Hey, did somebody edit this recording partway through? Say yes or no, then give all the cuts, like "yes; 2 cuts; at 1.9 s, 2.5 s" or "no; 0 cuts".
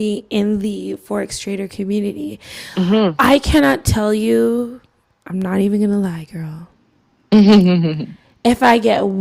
no; 0 cuts